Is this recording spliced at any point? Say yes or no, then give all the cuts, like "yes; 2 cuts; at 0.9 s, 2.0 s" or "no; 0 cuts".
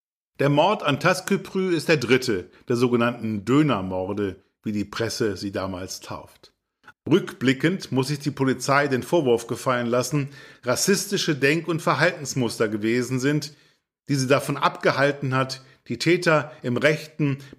yes; 2 cuts; at 6.9 s, 10.5 s